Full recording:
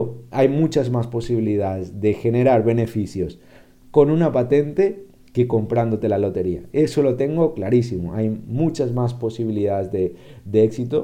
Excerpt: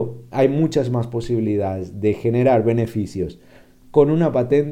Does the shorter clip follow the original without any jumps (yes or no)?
yes